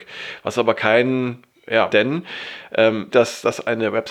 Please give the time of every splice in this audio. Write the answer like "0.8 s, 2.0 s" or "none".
1.9 s, 3.1 s